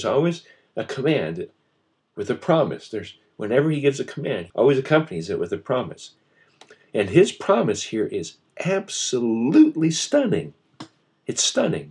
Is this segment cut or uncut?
cut